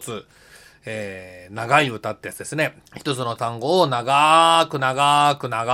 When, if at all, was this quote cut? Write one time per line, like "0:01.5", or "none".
0:02.9